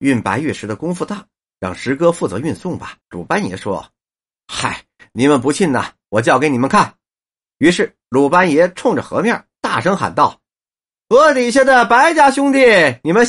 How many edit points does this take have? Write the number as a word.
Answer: one